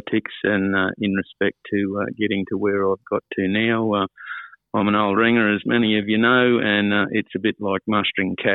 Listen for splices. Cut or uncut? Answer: uncut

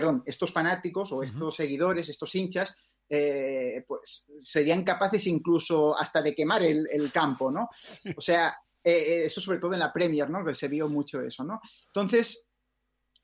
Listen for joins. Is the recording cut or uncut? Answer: cut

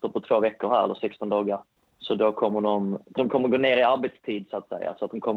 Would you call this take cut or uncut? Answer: cut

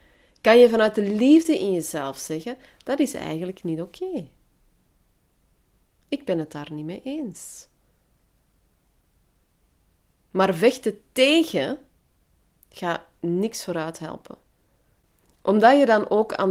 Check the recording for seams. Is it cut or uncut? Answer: uncut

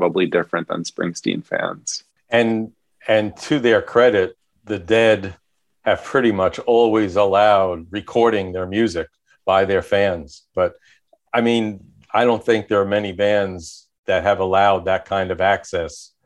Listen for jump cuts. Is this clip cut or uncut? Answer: cut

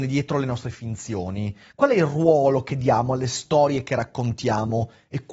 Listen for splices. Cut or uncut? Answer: uncut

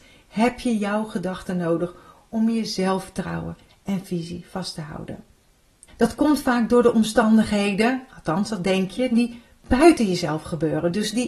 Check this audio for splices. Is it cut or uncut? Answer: cut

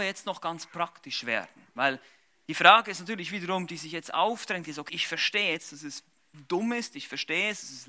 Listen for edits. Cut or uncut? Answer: cut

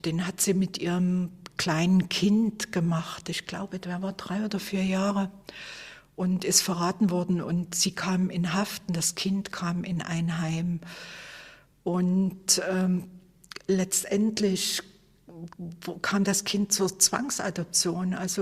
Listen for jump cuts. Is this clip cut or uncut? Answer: uncut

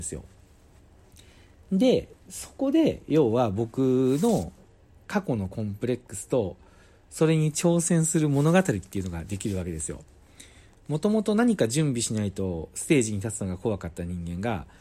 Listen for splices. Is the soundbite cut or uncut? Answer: uncut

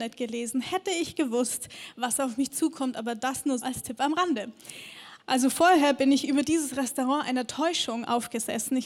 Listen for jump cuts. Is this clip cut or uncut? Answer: cut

